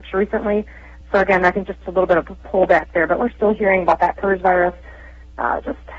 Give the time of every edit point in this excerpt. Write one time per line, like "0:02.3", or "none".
0:01.0